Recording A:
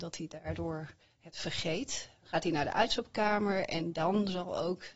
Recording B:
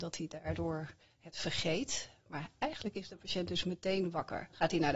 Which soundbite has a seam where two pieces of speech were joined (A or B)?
A